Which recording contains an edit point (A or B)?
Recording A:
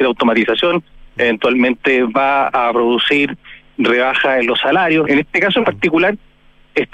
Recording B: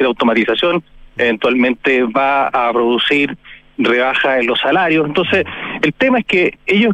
A